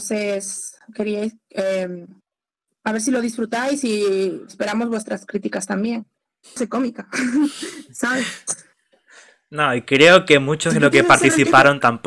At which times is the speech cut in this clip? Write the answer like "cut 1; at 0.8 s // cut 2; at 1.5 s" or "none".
cut 1; at 4.5 s // cut 2; at 6.4 s